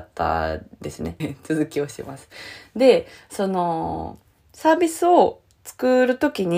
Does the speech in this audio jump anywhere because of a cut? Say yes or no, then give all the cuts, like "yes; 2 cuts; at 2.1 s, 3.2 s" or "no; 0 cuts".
yes; 1 cut; at 1.2 s